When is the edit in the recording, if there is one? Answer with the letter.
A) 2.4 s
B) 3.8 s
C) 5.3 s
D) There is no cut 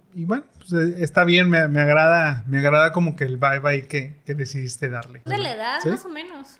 C